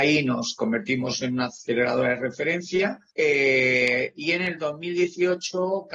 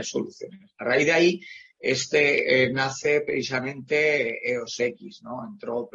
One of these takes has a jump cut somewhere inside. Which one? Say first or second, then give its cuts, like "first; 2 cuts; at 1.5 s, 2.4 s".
first; 1 cut; at 3.1 s